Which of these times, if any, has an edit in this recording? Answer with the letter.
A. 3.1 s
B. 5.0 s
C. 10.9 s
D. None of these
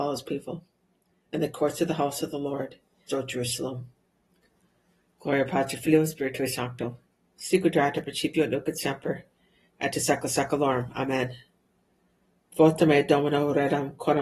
A